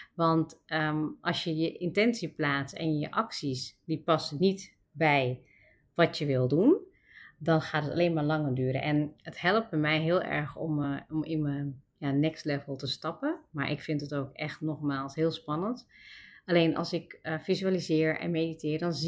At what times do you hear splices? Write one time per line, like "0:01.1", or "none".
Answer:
none